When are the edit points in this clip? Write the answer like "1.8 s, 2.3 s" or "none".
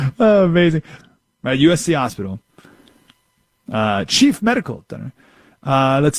1.0 s